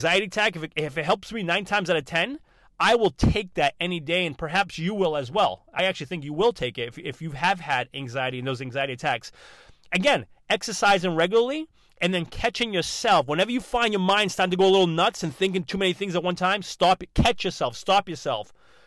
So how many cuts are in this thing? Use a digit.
0